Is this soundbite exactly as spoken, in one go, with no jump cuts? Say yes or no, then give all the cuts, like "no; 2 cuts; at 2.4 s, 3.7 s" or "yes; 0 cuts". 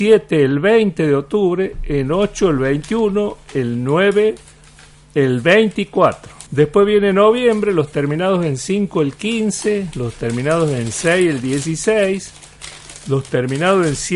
no; 1 cut; at 6.5 s